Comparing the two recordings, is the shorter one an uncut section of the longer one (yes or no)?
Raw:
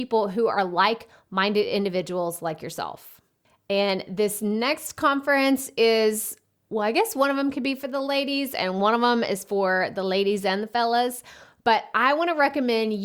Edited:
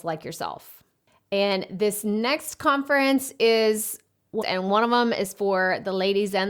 no